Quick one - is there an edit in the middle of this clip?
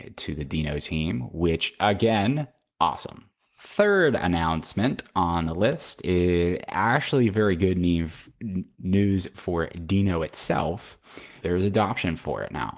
yes; 1 cut; at 11.4 s

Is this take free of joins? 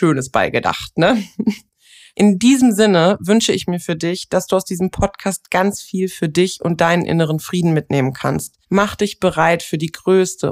no; 2 cuts; at 2.1 s, 8.6 s

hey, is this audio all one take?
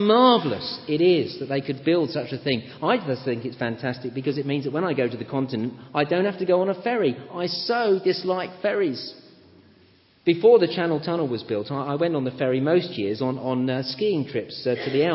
yes; 0 cuts

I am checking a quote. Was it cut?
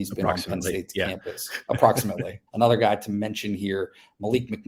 yes; 1 cut; at 2.5 s

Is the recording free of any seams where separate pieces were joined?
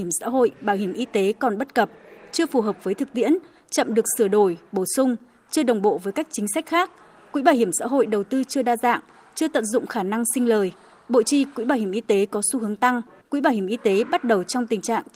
no; 1 cut; at 13.2 s

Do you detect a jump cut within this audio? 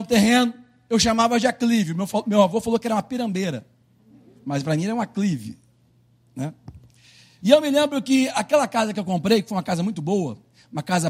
yes; 1 cut; at 7.4 s

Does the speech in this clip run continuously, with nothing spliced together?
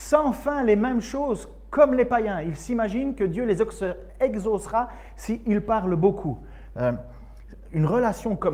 no; 1 cut; at 6.7 s

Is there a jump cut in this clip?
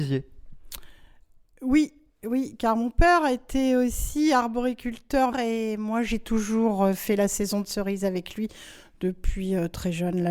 yes; 1 cut; at 5.3 s

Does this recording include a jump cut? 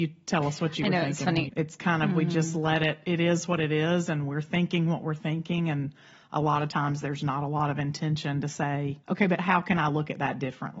yes; 2 cuts; at 1.5 s, 9.0 s

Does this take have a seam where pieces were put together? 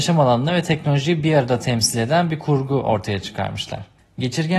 no; 0 cuts

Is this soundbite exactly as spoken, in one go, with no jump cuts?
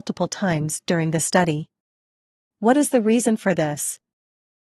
yes; 0 cuts

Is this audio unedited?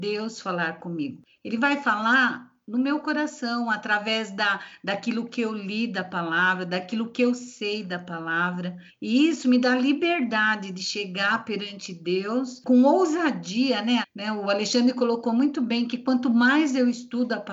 no; 3 cuts; at 1.2 s, 8.9 s, 14.0 s

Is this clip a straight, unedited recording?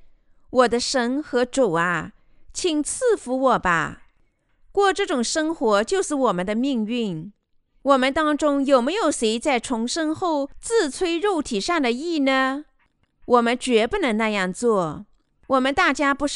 yes; 0 cuts

